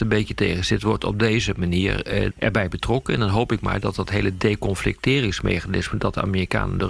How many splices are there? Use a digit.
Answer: 1